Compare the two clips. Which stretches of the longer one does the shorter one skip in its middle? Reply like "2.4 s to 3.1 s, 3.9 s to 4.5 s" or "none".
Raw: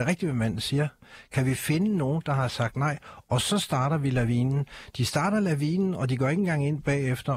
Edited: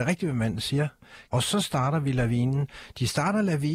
1.3 s to 3.3 s